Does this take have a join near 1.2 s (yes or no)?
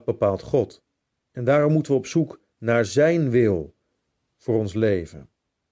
yes